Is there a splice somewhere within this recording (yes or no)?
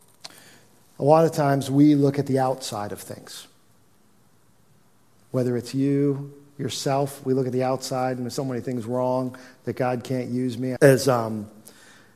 yes